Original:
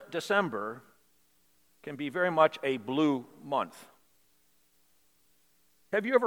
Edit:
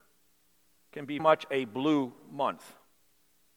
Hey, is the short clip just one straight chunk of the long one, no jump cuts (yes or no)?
no